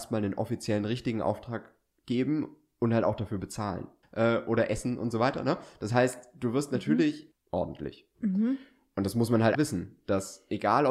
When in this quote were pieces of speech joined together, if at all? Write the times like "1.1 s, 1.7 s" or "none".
4.0 s, 7.3 s, 9.5 s